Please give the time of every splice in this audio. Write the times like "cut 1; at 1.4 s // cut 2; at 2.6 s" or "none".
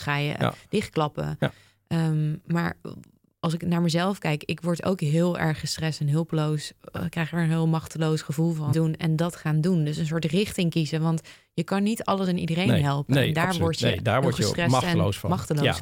cut 1; at 8.7 s